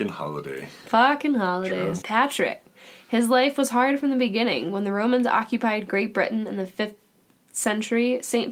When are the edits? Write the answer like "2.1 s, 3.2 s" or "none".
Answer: 2.0 s